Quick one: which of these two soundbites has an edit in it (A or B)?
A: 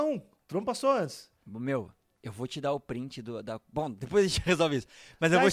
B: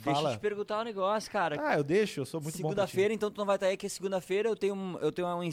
A